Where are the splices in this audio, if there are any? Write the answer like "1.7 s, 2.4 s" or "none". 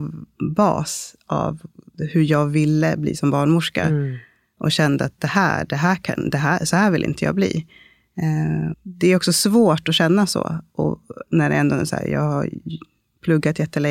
8.7 s